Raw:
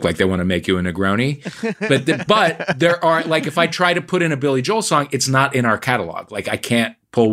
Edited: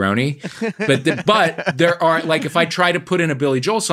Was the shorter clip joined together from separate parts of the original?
no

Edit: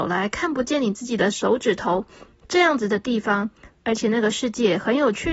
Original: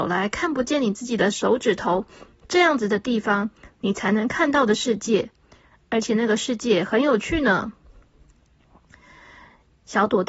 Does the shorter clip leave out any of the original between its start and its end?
yes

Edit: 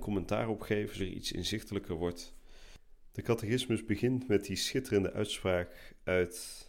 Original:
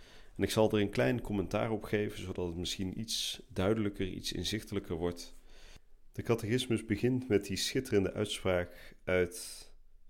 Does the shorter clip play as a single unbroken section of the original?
no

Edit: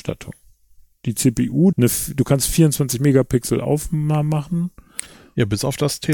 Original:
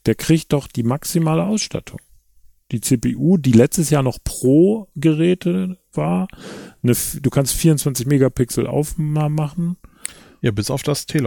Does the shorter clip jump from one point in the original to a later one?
yes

